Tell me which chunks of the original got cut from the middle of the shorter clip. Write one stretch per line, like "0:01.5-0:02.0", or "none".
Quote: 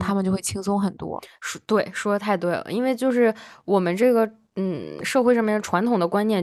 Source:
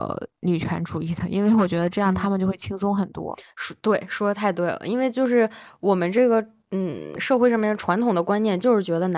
none